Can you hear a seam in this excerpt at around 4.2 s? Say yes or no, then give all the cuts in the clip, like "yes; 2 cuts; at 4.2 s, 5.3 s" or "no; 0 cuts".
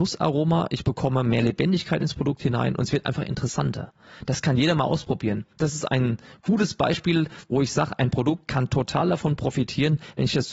no; 0 cuts